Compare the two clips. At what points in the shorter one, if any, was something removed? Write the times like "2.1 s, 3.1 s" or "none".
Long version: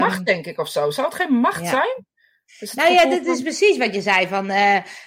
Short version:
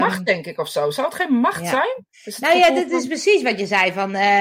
2.1 s